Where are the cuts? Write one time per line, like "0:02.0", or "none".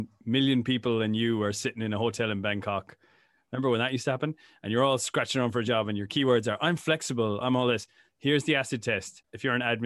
0:07.4